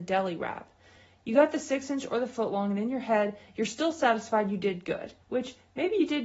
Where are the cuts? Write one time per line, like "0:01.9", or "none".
0:05.2